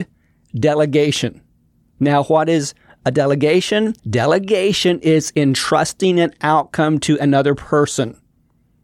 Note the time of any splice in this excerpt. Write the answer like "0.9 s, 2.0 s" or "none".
4.0 s